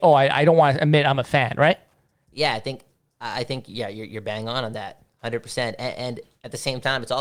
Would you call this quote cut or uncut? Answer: uncut